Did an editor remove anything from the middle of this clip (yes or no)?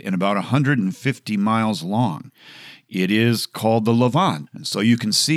yes